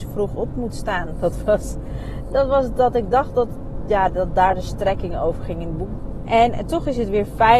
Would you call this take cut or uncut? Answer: cut